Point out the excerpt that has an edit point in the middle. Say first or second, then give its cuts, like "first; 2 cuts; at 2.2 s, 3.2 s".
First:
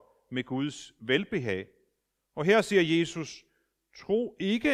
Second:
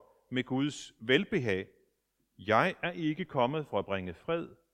second; 1 cut; at 2.2 s